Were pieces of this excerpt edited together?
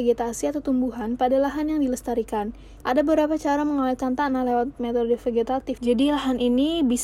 yes; 2 cuts; at 2.8 s, 5.8 s

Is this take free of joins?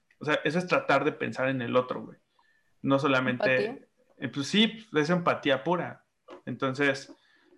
yes; 0 cuts

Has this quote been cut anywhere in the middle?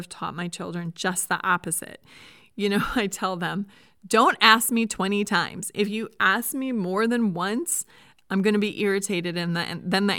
no; 0 cuts

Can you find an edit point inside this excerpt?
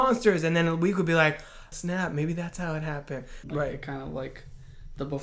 yes; 2 cuts; at 1.7 s, 3.4 s

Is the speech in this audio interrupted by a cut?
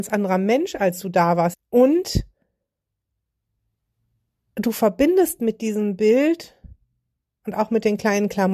yes; 1 cut; at 1.5 s

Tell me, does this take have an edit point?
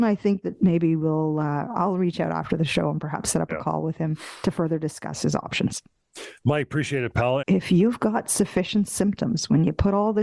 yes; 1 cut; at 7.4 s

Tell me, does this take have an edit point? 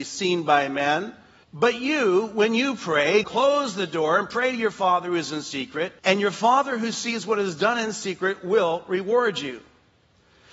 yes; 3 cuts; at 1.4 s, 3.2 s, 6.0 s

